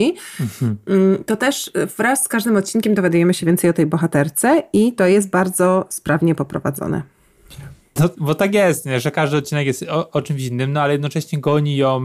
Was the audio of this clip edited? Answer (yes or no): yes